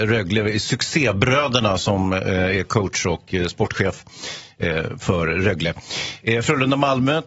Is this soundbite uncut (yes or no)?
yes